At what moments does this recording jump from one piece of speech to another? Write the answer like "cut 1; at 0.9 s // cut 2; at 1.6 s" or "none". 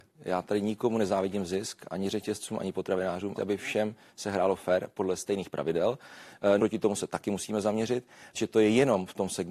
cut 1; at 3.4 s // cut 2; at 6.6 s // cut 3; at 8.3 s